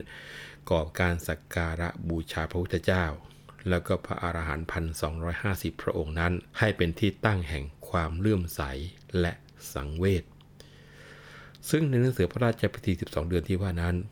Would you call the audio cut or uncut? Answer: cut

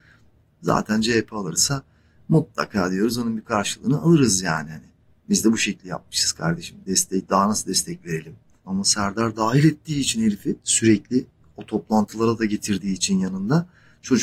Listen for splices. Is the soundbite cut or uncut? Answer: cut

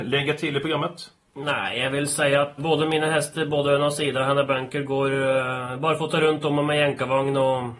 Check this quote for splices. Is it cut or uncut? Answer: cut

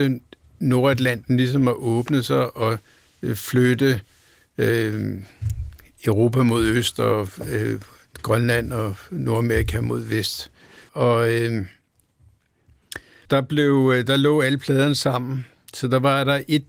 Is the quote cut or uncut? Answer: cut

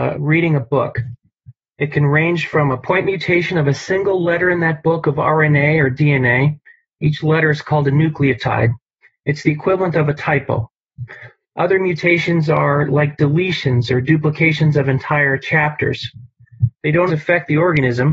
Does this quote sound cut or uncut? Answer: cut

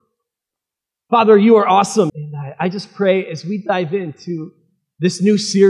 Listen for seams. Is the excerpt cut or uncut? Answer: cut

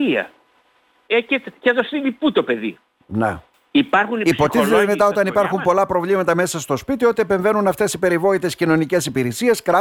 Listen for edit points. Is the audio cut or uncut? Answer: cut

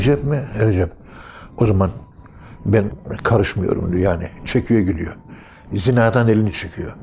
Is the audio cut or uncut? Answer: uncut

